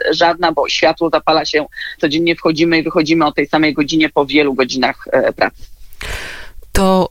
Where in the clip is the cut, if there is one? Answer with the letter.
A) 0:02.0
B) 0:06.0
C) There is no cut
A